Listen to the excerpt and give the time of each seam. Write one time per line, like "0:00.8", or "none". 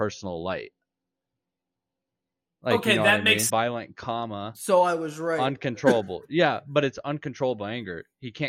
0:03.5